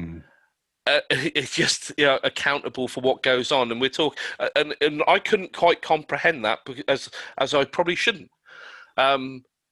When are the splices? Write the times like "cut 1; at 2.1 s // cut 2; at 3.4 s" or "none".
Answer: none

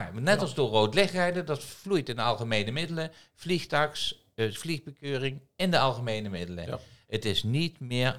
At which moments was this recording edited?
none

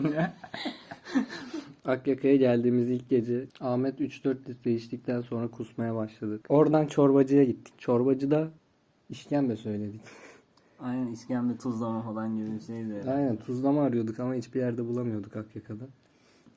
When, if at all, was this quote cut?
cut 1; at 1.8 s // cut 2; at 6.4 s

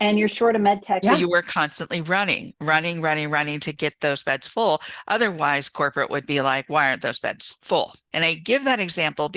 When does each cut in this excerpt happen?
cut 1; at 1.0 s // cut 2; at 8.0 s

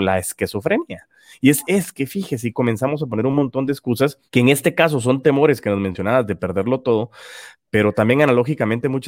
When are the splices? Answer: cut 1; at 1.6 s // cut 2; at 4.3 s

